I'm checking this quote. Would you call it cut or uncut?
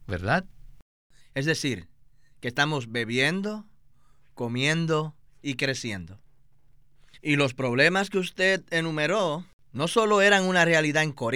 cut